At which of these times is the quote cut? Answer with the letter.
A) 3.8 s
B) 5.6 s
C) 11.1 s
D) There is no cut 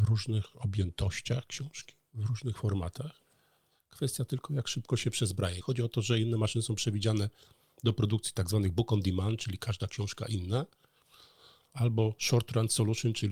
B